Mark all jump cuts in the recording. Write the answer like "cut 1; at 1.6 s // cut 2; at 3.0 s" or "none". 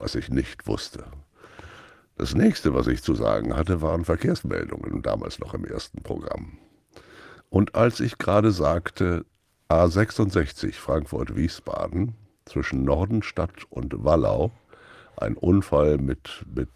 none